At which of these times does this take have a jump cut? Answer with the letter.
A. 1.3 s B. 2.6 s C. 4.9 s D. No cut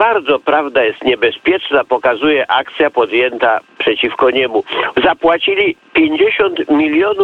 C